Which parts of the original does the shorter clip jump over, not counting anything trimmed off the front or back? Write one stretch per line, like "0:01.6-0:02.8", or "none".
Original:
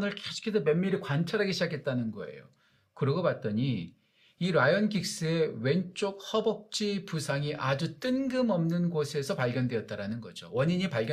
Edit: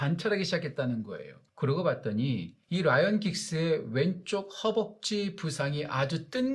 0:02.6-0:02.9
0:04.0-0:04.3